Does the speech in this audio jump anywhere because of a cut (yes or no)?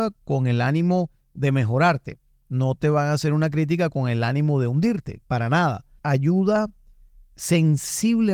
yes